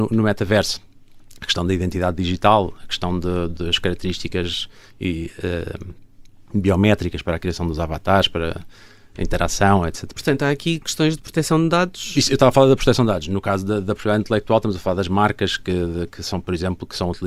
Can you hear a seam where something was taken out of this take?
yes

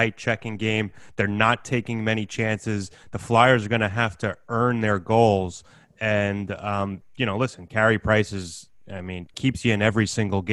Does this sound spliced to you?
no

